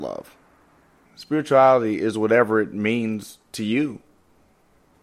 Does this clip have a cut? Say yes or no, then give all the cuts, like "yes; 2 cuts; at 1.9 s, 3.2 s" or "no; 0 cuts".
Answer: yes; 1 cut; at 1.0 s